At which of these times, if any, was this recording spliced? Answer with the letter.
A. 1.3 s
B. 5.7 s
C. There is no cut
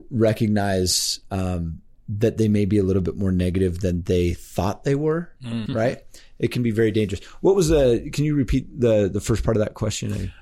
B